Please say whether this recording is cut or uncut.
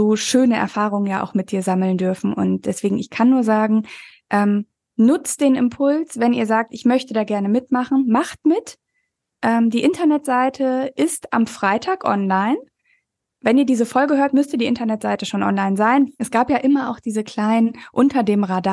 cut